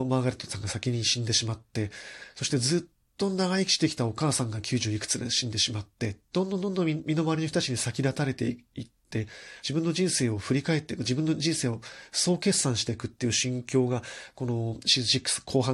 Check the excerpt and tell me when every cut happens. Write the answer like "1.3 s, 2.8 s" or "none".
6.3 s, 9.6 s